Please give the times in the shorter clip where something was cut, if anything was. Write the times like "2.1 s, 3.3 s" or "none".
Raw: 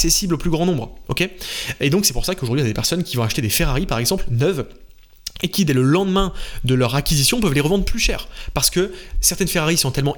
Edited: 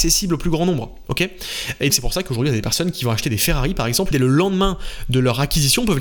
1.9 s, 4.1 s